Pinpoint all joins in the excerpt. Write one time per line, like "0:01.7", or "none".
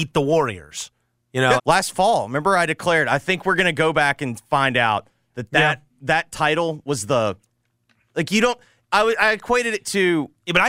0:01.6